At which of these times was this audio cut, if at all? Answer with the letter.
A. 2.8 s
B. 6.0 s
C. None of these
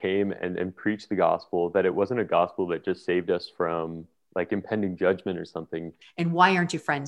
B